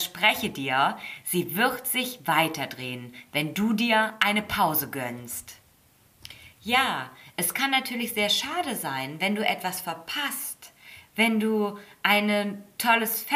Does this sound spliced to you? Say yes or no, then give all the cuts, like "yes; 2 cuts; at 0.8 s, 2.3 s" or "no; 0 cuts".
no; 0 cuts